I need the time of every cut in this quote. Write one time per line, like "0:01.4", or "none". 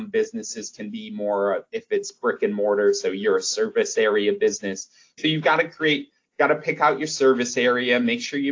none